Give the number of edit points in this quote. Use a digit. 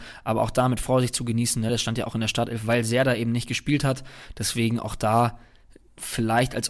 0